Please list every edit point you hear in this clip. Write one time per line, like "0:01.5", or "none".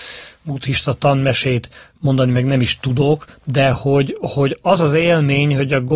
none